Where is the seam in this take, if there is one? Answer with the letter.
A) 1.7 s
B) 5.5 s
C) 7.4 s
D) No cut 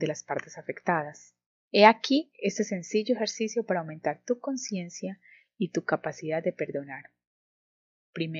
A